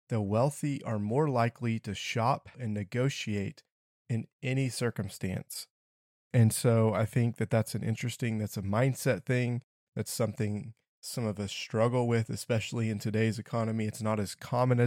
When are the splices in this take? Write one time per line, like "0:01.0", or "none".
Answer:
0:02.5

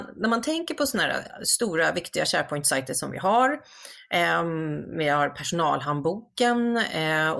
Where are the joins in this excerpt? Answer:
none

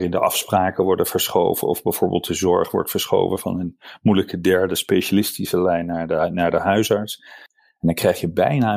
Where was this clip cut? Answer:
0:07.5

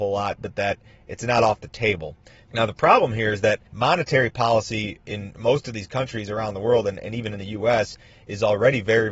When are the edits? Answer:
0:02.4
0:03.7

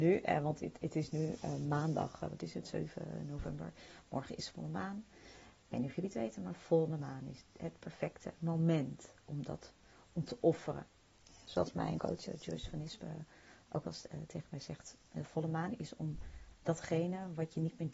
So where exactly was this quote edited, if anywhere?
0:12.0

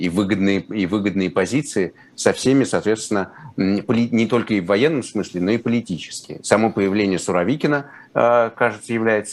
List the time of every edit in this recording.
none

